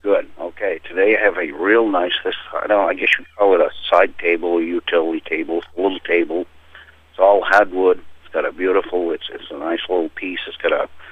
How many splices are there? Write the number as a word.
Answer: zero